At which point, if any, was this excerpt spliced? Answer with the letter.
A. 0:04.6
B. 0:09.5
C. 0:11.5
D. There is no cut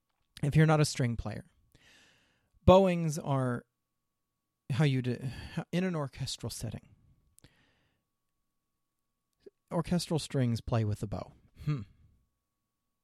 C